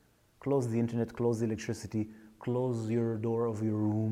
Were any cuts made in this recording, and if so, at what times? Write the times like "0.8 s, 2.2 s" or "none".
none